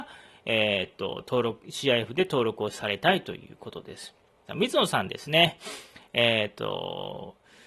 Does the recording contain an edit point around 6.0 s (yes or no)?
no